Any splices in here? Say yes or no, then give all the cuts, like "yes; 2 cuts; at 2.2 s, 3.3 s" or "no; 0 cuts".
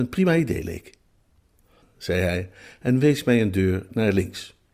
yes; 1 cut; at 1.8 s